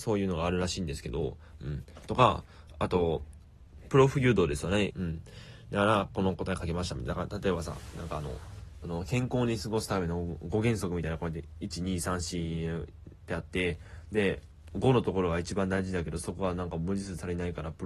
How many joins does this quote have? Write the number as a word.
two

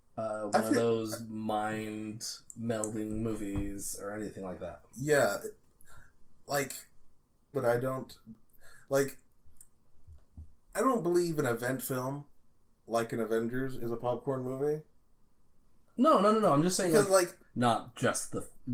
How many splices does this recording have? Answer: two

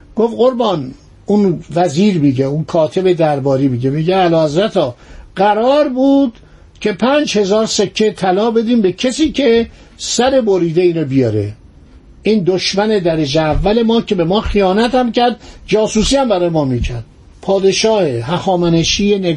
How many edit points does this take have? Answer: zero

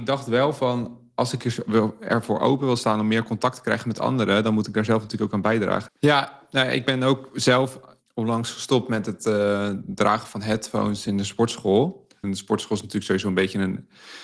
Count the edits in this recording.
two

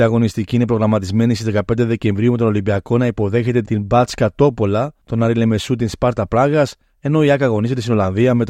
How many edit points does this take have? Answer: one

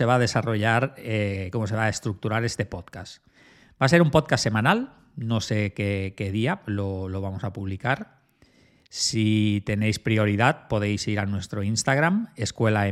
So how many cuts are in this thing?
zero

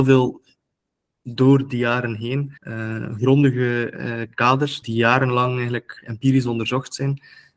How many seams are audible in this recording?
two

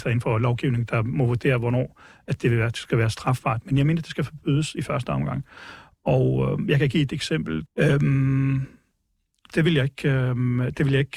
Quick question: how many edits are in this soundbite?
two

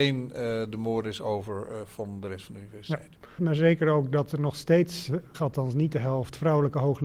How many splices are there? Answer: two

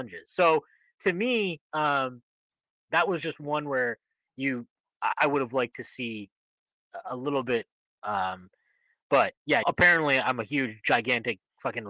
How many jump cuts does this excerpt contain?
two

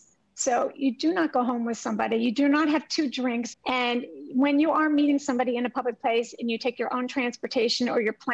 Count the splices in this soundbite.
one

